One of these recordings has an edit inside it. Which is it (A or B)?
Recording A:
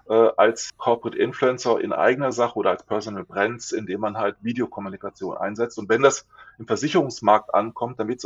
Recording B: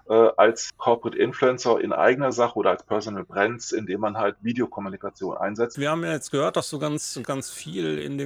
B